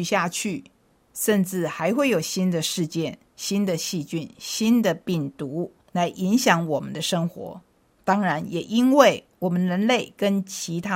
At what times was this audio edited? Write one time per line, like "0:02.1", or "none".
none

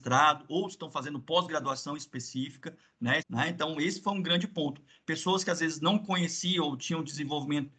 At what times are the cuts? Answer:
0:03.2

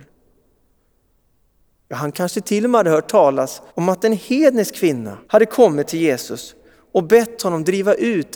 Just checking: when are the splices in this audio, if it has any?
0:03.7
0:05.2

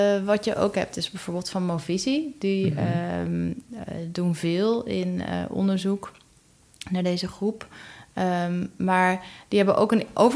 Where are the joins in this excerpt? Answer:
none

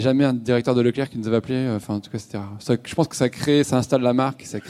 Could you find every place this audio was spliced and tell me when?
none

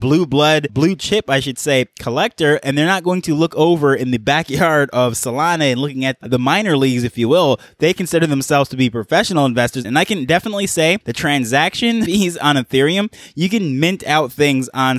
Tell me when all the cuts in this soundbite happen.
0:09.8

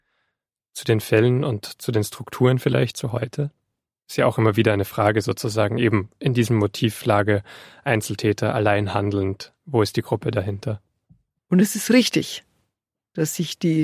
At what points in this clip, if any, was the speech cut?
0:11.4

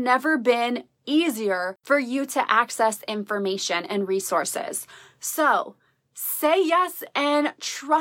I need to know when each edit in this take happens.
none

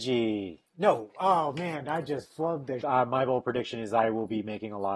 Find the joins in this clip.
0:02.8

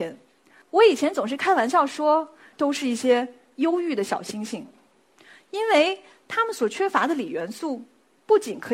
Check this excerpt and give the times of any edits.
0:02.5

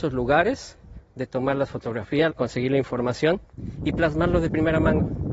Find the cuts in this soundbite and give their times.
0:02.3

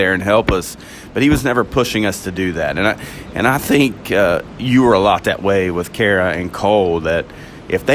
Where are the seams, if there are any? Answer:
none

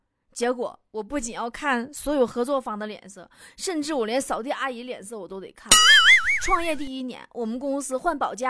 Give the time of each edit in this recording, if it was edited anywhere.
0:03.5

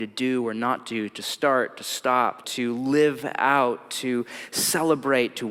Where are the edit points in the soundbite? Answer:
0:02.4

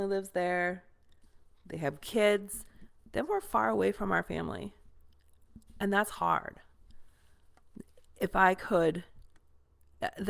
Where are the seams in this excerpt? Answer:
none

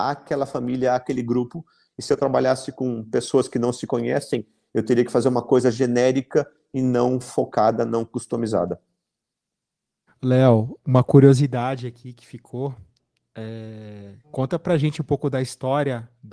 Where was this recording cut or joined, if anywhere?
0:10.1
0:14.2

